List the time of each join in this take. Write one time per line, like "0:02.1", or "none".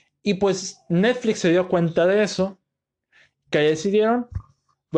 none